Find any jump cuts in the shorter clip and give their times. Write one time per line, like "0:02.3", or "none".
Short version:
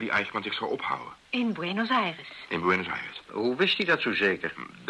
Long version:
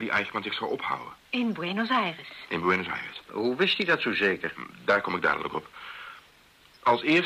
none